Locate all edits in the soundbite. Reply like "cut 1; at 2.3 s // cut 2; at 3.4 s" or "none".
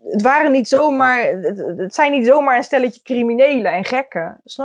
none